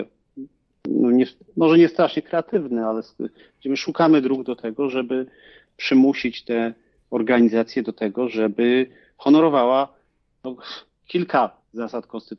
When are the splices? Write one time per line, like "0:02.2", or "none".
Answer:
none